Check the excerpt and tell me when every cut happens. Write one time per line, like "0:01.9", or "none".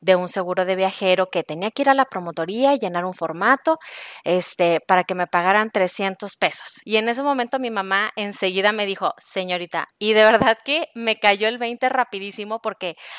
0:06.8
0:09.9